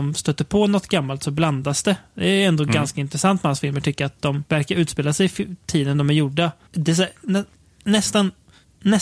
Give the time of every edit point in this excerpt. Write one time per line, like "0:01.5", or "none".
0:04.5
0:06.7

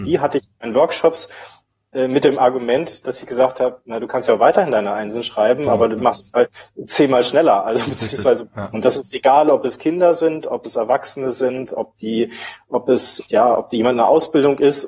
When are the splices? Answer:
0:08.7
0:13.2

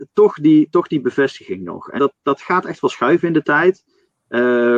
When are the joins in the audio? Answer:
0:02.0

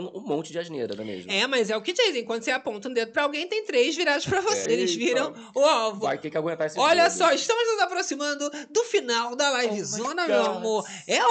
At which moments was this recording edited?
0:04.7

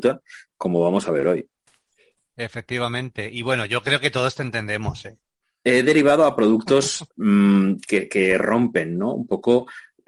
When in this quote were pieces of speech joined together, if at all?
0:05.2

